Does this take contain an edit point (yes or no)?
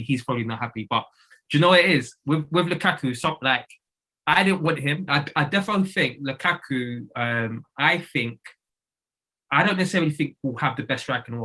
yes